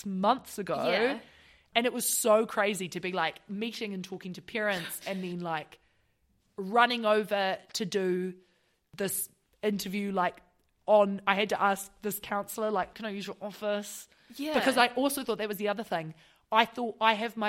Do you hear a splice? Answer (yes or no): yes